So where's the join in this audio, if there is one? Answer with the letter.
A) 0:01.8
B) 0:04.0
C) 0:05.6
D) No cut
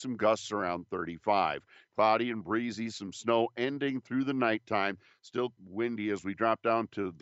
C